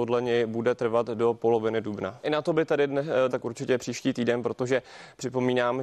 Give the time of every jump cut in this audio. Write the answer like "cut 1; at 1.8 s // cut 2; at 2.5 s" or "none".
cut 1; at 2.2 s // cut 2; at 3.3 s